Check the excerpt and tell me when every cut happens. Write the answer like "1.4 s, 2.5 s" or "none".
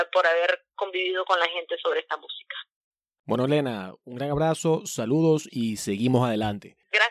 none